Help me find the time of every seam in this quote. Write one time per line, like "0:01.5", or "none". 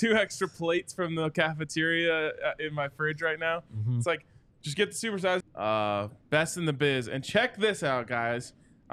0:05.4